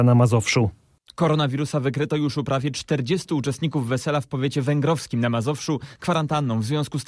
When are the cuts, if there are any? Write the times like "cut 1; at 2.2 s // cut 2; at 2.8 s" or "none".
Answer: cut 1; at 6.0 s

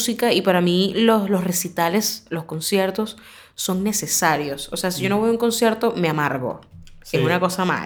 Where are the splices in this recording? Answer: none

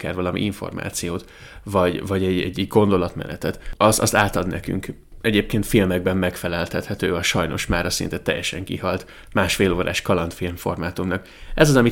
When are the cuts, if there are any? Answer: none

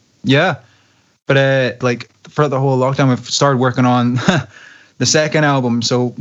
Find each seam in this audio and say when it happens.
cut 1; at 1.8 s

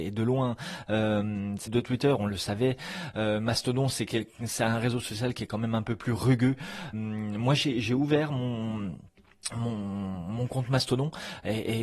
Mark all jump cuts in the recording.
cut 1; at 1.7 s // cut 2; at 6.9 s

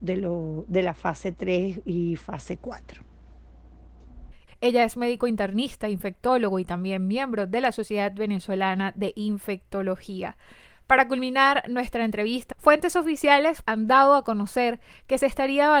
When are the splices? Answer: cut 1; at 4.5 s // cut 2; at 12.5 s // cut 3; at 13.6 s

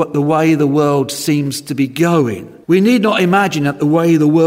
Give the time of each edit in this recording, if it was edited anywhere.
cut 1; at 2.6 s

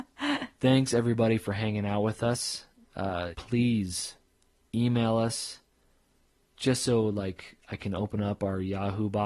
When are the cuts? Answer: cut 1; at 3.3 s

